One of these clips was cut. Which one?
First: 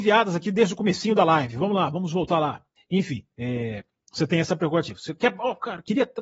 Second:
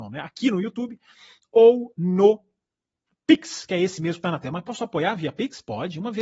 first; 1 cut; at 2.8 s

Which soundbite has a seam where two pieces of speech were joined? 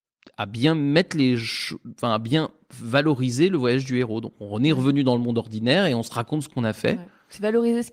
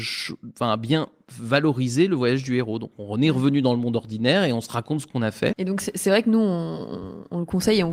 second; 1 cut; at 5.5 s

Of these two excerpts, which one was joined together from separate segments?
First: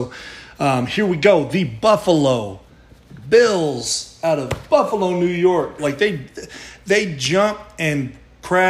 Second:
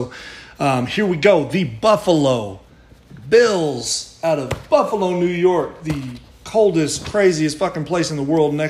first; 1 cut; at 5.8 s

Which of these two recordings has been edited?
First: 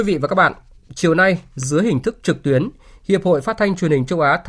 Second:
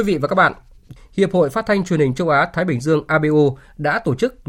second; 1 cut; at 1.0 s

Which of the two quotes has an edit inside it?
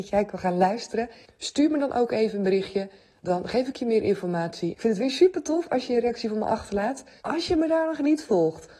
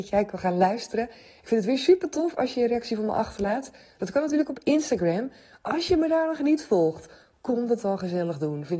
first; 3 cuts; at 1.2 s, 4.7 s, 7.2 s

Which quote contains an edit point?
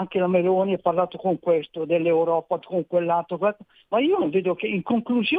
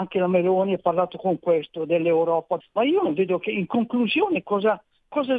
second; 1 cut; at 2.6 s

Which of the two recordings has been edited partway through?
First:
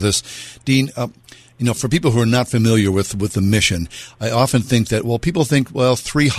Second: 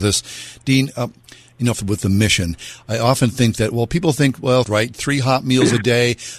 second; 2 cuts; at 1.7 s, 4.6 s

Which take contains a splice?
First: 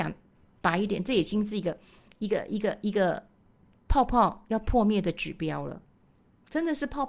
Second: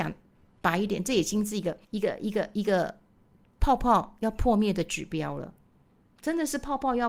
second; 1 cut; at 1.8 s

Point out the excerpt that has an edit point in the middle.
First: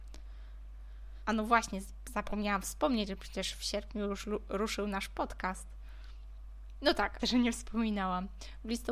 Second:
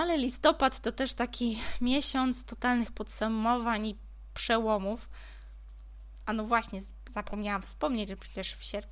first; 2 cuts; at 1.3 s, 7.2 s

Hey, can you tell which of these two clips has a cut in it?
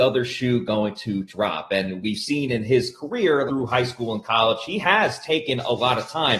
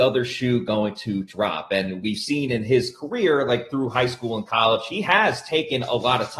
first; 1 cut; at 3.5 s

